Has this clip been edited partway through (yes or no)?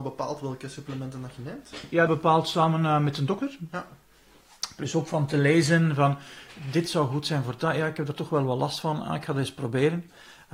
yes